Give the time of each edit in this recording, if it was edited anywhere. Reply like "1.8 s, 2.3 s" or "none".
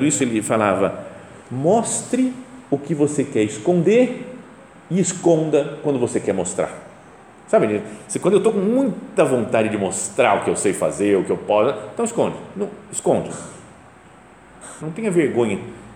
12.5 s, 14.8 s

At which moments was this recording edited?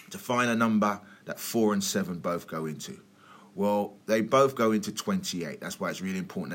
none

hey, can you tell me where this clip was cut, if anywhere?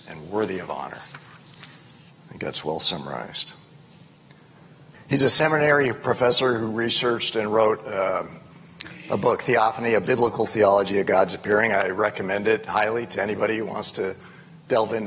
4.9 s

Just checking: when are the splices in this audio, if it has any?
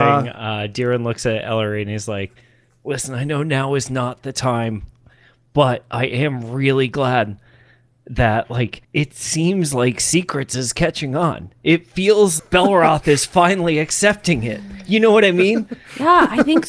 8.8 s, 12.4 s

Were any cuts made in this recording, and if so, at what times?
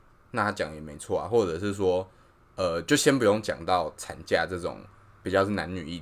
none

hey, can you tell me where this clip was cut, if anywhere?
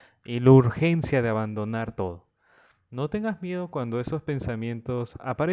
none

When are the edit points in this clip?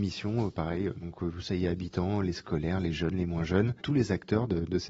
none

